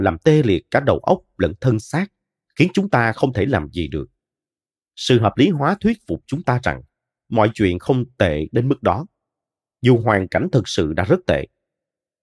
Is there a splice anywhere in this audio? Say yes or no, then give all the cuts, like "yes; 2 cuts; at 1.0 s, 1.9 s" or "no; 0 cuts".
no; 0 cuts